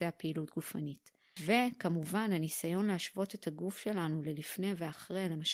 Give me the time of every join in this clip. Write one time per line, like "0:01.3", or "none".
0:01.4